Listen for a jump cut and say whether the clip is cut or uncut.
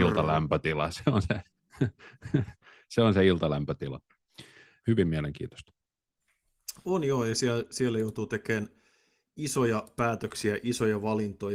cut